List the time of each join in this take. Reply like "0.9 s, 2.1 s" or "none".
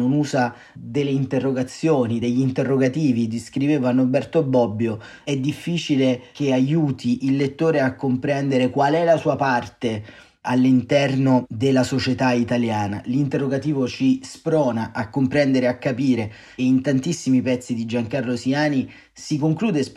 none